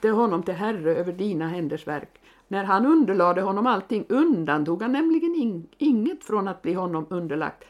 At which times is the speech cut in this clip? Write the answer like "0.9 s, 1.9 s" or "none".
2.5 s